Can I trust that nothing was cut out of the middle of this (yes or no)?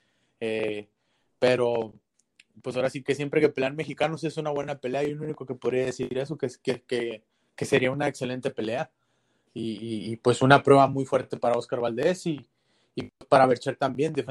yes